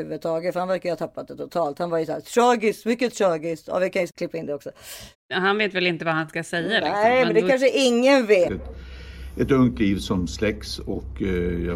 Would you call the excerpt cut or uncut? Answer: cut